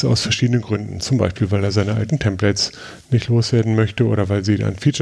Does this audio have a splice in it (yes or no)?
no